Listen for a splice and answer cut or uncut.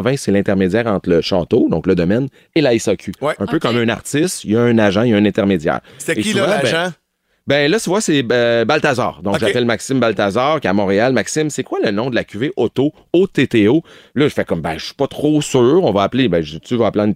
uncut